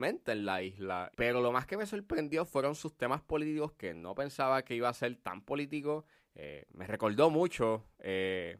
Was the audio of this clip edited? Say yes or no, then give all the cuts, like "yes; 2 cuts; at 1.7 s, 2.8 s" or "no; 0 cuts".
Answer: yes; 2 cuts; at 1.1 s, 6.2 s